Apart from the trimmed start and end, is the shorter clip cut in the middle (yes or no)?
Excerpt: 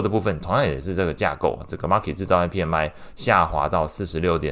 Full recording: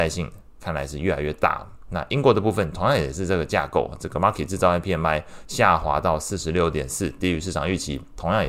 no